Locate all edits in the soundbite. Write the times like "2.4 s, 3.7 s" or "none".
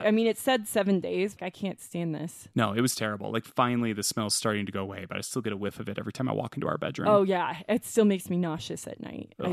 1.4 s